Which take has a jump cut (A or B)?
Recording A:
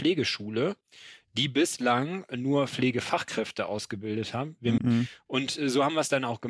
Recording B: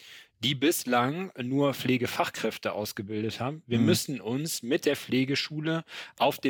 A